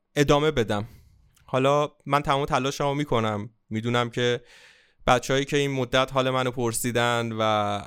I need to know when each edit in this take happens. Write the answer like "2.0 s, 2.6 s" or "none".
none